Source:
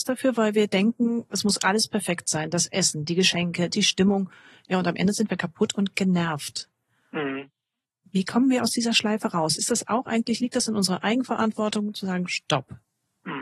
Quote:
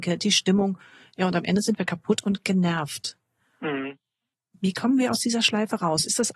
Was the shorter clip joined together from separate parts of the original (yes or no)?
no